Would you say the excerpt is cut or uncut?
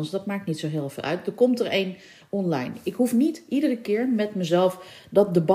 uncut